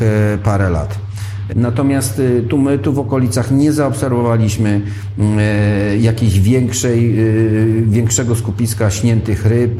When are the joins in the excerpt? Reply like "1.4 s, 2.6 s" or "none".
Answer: 1.5 s